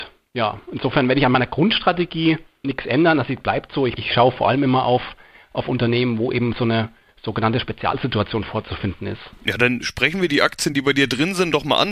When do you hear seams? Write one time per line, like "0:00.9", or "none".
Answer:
none